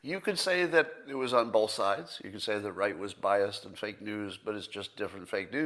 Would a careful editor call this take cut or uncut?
uncut